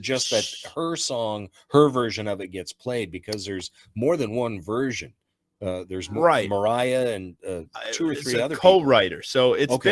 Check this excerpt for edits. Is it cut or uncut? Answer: uncut